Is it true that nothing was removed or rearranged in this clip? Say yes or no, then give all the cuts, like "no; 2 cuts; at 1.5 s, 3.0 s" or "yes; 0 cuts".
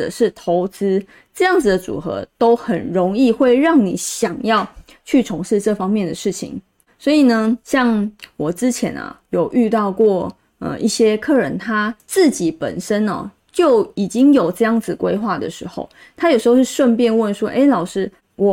yes; 0 cuts